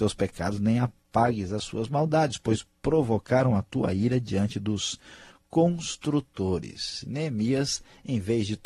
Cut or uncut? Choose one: uncut